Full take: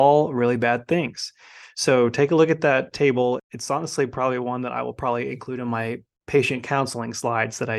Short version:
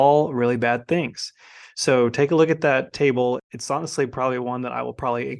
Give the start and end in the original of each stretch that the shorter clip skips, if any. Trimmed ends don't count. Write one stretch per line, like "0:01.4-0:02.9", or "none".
none